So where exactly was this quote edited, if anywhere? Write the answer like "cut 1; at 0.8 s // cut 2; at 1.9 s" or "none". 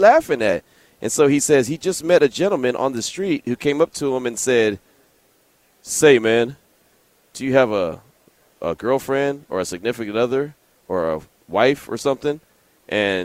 none